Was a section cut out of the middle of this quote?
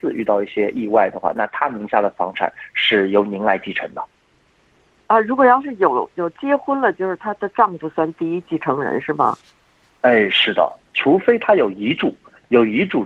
no; 0 cuts

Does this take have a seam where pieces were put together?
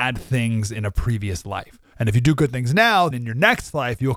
yes; 2 cuts; at 1.9 s, 3.1 s

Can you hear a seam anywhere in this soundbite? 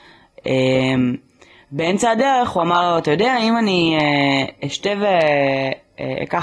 no; 0 cuts

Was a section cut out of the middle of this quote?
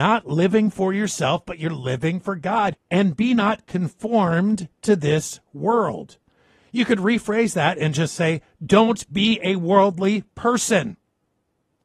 yes; 1 cut; at 2.7 s

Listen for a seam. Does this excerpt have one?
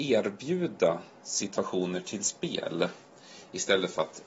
no; 0 cuts

